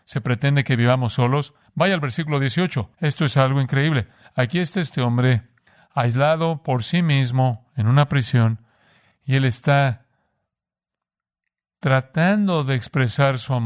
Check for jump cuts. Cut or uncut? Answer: cut